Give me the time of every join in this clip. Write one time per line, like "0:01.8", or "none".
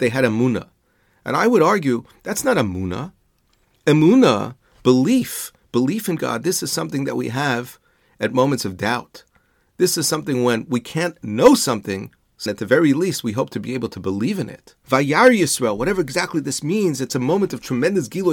0:12.5
0:14.8